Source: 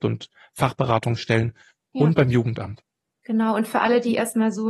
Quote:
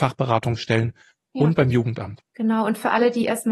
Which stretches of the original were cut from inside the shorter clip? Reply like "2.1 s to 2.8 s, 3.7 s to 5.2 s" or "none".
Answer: 2.9 s to 3.2 s